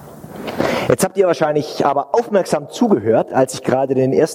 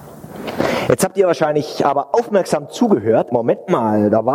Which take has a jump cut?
second; 1 cut; at 3.3 s

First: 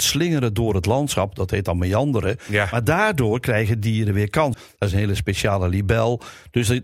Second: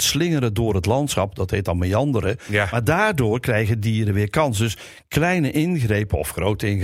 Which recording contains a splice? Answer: first; 1 cut; at 4.5 s

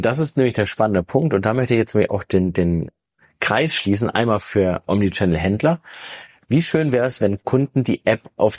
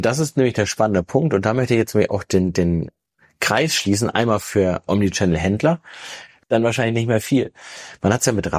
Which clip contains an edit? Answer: second; 1 cut; at 6.4 s

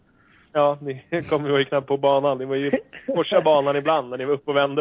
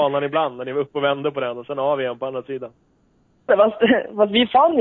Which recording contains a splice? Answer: second; 1 cut; at 3.5 s

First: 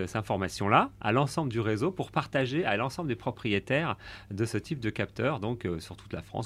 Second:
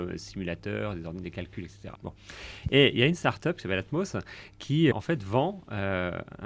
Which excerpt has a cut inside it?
second; 2 cuts; at 2.0 s, 4.9 s

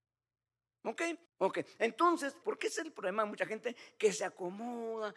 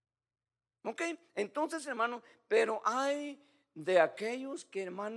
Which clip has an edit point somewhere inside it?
first; 2 cuts; at 1.3 s, 2.4 s

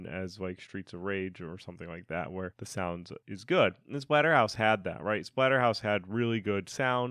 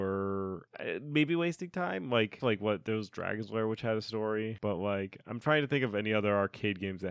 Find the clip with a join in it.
second; 1 cut; at 2.4 s

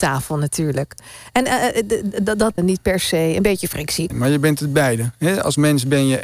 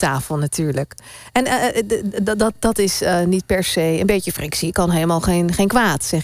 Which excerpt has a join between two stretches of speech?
first; 2 cuts; at 2.6 s, 4.1 s

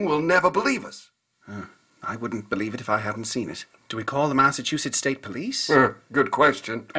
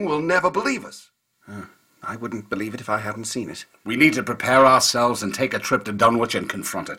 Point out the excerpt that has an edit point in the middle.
first; 1 cut; at 3.8 s

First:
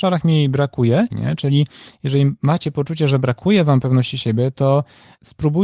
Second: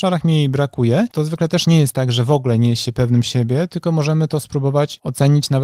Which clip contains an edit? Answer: first; 1 cut; at 1.1 s

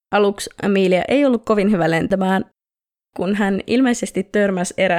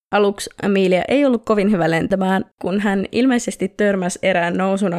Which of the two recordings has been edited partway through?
second; 1 cut; at 2.5 s

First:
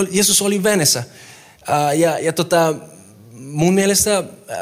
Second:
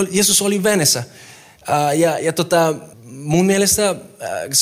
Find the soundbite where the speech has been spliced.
second; 1 cut; at 2.9 s

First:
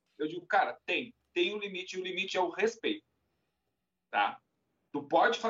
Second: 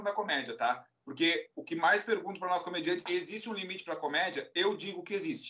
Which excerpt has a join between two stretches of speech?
second; 1 cut; at 3.1 s

